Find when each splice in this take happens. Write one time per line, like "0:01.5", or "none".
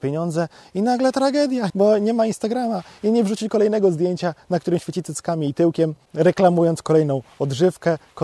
0:01.7